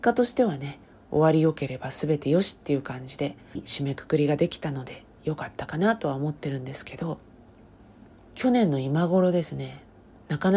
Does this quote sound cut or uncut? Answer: cut